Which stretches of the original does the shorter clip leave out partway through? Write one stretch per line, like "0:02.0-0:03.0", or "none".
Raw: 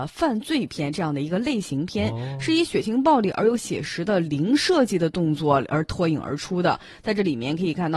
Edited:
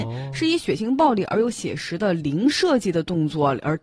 none